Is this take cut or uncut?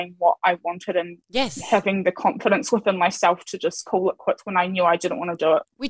uncut